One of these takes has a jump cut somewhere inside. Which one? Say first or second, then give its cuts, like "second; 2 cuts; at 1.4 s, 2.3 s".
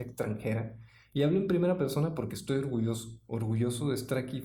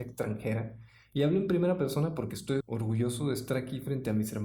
second; 1 cut; at 2.6 s